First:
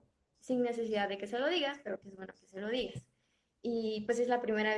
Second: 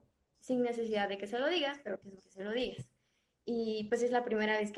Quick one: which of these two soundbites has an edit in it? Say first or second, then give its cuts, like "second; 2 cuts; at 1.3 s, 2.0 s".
second; 1 cut; at 2.2 s